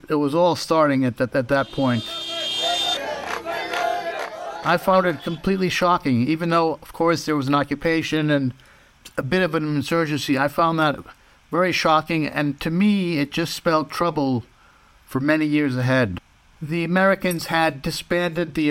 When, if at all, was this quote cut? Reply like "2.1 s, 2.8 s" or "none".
none